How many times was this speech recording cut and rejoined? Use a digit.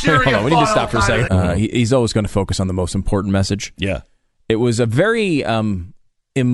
1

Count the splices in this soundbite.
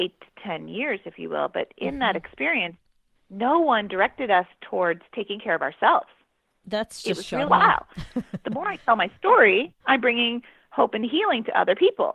2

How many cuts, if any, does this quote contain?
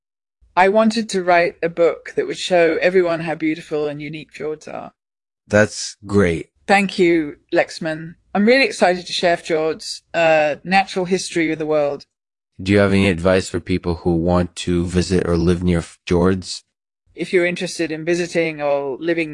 1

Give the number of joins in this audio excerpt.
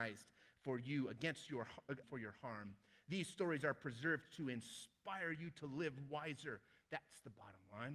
1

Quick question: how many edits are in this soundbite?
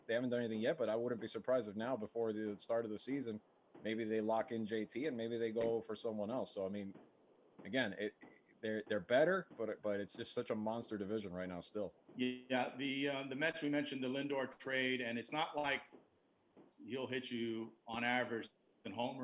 1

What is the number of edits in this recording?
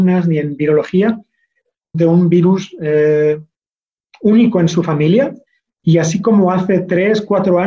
2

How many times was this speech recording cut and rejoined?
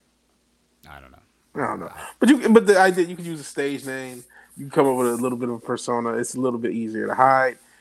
0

